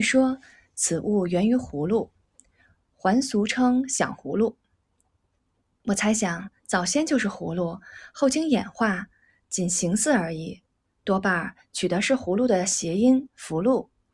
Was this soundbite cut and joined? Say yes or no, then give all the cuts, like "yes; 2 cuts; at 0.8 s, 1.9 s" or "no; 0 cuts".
no; 0 cuts